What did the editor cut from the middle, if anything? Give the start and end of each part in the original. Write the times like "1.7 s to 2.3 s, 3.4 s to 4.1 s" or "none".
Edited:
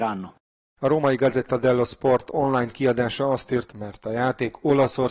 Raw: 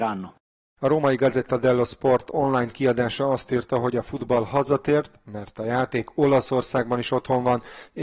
3.7 s to 5.2 s